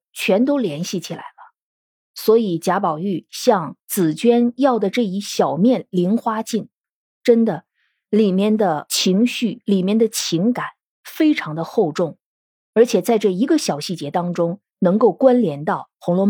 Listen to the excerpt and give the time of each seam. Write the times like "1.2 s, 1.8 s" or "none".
none